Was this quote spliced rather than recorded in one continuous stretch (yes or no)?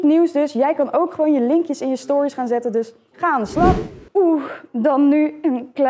yes